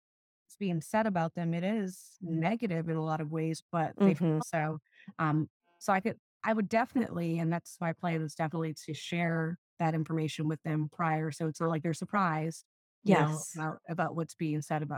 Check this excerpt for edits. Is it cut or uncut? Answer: cut